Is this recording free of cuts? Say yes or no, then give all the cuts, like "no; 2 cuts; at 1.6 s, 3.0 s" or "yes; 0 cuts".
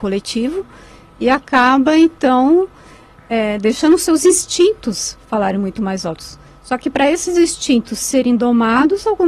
yes; 0 cuts